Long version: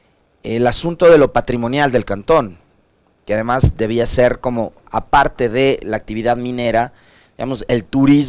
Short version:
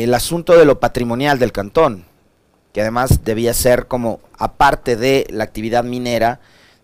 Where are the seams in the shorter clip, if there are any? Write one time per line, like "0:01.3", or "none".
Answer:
none